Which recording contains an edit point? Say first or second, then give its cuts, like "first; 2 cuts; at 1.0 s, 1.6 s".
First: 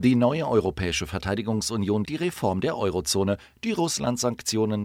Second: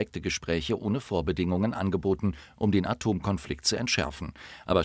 first; 1 cut; at 2.1 s